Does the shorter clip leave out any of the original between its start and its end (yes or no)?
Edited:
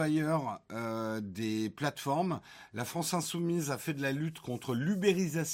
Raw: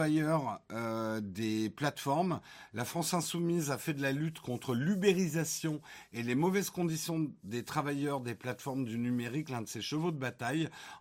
no